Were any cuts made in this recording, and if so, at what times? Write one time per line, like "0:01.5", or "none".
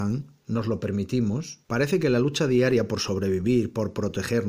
0:01.6

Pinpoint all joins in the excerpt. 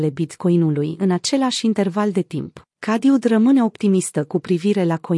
0:02.7

